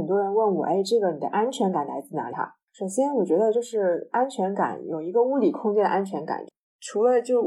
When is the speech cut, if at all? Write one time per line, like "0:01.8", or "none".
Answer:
0:02.3